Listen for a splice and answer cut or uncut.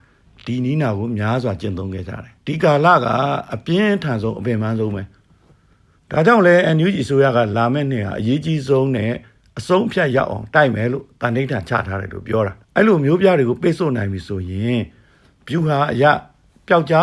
cut